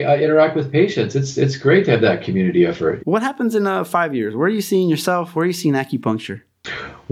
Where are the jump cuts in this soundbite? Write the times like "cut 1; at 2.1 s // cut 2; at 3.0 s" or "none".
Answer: cut 1; at 3.0 s